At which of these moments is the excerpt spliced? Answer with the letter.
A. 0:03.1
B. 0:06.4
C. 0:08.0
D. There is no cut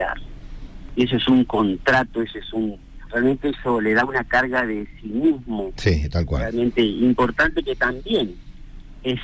A